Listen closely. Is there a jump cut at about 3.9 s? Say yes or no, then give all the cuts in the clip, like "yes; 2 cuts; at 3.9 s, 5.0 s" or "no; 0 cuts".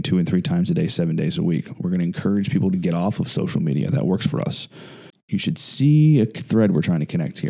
no; 2 cuts; at 1.7 s, 5.1 s